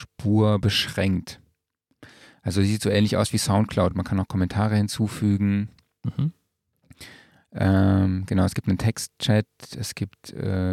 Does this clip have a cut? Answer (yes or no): no